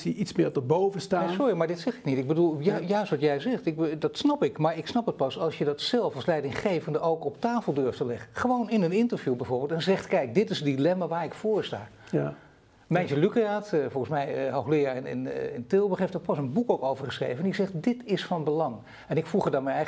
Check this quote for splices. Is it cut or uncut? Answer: uncut